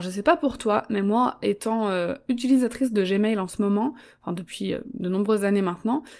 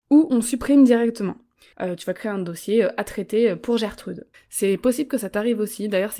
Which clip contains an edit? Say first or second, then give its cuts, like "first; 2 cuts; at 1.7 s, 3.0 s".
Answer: second; 2 cuts; at 1.7 s, 4.3 s